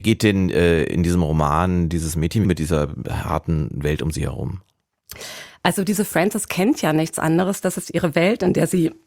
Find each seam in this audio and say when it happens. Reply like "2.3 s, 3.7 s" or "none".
2.4 s